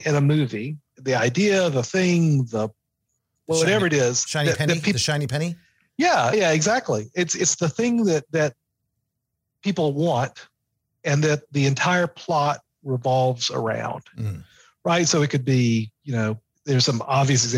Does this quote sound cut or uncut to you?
cut